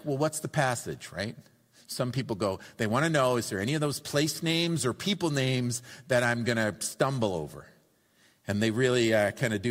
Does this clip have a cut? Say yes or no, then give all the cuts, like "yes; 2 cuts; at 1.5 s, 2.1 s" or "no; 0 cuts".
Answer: no; 0 cuts